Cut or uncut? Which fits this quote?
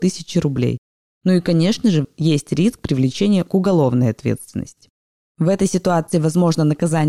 cut